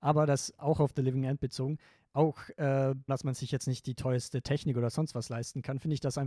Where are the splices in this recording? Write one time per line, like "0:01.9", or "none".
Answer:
0:03.1